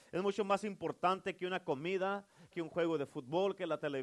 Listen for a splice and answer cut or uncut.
cut